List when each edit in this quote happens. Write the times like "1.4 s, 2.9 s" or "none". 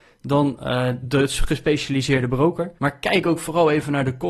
1.0 s, 2.8 s